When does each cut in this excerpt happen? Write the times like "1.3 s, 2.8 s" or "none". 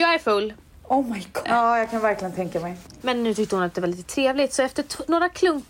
1.4 s, 3.0 s